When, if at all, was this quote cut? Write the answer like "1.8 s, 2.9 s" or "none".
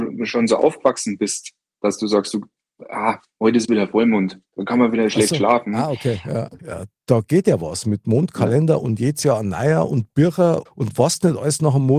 6.6 s, 10.7 s